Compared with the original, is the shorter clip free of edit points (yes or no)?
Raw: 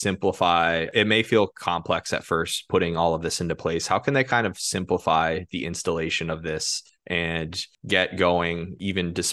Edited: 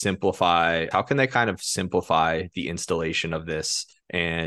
no